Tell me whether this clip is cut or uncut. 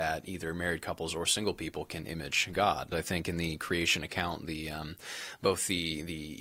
cut